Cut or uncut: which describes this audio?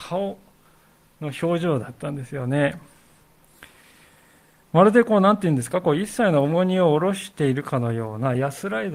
uncut